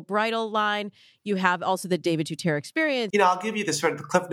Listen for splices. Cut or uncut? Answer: cut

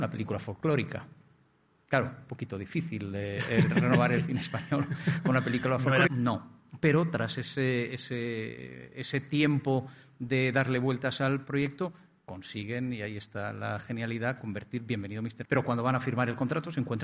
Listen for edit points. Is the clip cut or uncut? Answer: cut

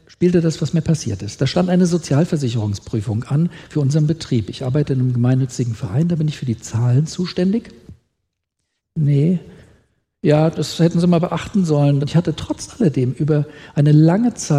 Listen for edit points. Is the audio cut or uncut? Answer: cut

